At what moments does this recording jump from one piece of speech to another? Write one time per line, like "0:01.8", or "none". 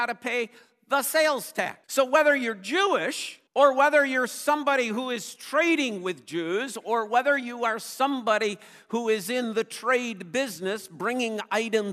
0:01.8
0:03.5